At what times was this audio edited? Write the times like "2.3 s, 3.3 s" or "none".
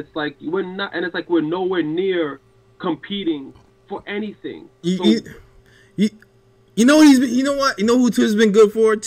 5.0 s